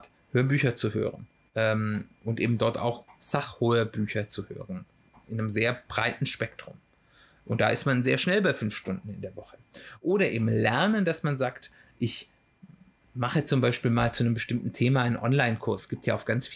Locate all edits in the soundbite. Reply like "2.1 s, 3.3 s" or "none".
none